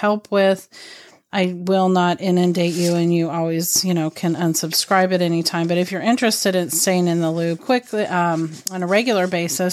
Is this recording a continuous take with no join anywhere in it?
no; 1 cut; at 7.6 s

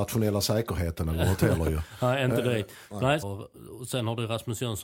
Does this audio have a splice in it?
yes; 1 cut; at 3.2 s

